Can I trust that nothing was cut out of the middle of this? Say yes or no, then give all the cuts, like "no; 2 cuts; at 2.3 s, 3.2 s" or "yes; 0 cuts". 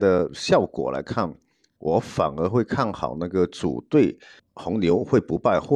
no; 1 cut; at 4.4 s